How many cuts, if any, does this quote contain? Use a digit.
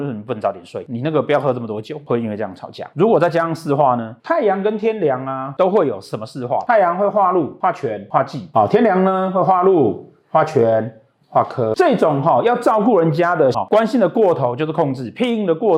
1